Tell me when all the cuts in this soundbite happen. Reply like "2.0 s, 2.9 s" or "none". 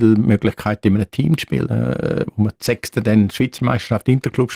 none